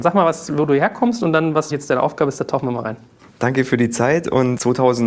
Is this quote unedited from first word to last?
no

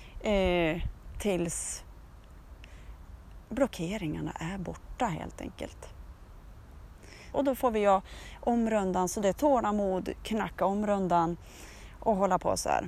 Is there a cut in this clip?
yes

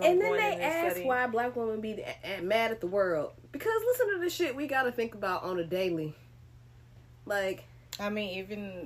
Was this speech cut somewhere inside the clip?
no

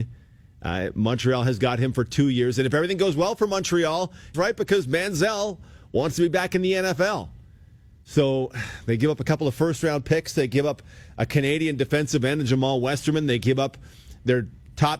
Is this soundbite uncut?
no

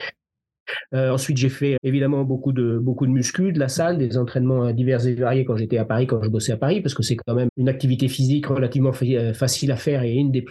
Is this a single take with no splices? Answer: no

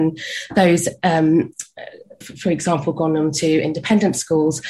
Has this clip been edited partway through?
yes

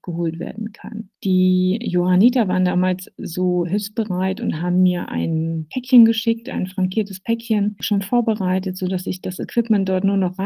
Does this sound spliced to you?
no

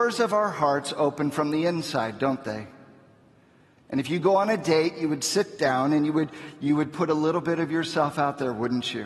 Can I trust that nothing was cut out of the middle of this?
yes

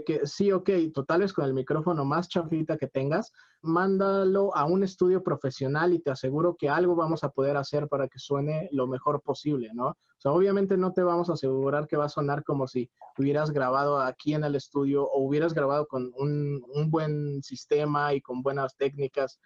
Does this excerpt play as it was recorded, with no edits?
no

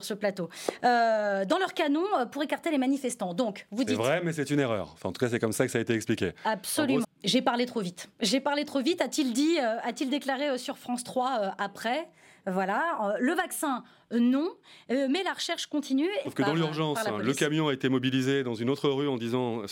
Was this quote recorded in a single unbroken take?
no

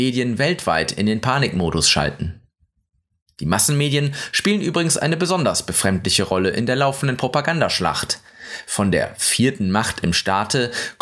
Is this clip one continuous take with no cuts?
yes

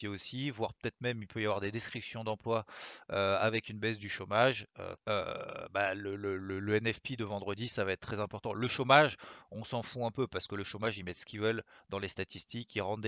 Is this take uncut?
no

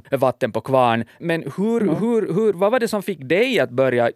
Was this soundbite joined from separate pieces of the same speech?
no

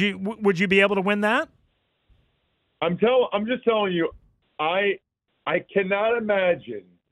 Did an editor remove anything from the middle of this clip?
no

